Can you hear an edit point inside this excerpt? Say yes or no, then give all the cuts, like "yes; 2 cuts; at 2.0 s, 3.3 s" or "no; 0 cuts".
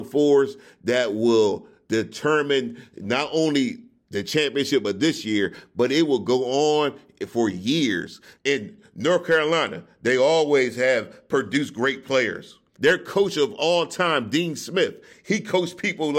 yes; 1 cut; at 8.4 s